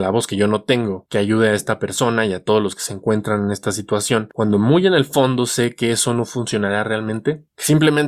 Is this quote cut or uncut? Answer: uncut